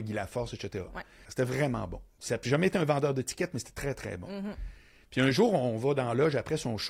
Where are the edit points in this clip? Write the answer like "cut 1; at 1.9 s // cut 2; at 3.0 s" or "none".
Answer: cut 1; at 1.3 s